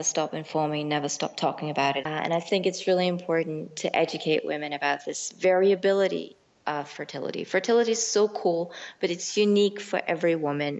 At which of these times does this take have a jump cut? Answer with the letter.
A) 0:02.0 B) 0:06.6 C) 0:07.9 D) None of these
A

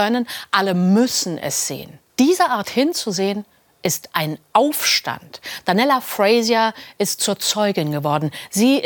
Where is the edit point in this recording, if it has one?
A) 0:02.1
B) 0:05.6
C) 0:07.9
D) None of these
A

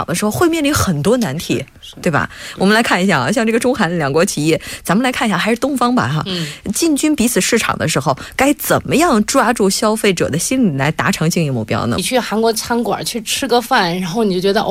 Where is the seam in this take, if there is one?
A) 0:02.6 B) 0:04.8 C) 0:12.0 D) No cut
C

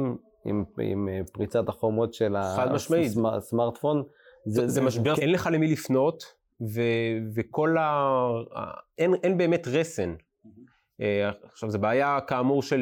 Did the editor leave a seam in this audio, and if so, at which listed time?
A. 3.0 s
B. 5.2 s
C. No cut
B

